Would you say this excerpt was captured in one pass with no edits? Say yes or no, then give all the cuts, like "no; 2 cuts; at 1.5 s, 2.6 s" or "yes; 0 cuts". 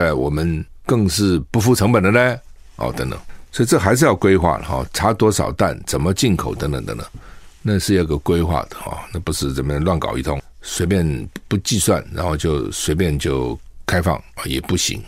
yes; 0 cuts